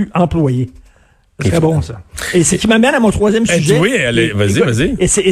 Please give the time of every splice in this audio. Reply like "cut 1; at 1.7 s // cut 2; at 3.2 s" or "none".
none